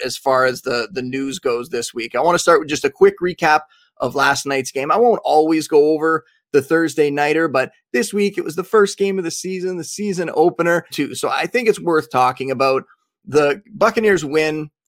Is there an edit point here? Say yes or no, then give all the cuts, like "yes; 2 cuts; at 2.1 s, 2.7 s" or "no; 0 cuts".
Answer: yes; 1 cut; at 10.9 s